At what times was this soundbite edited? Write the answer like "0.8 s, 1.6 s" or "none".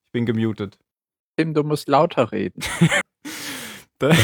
1.2 s, 3.0 s